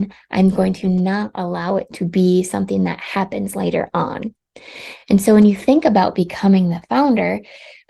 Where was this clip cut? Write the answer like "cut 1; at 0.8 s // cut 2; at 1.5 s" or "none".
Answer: none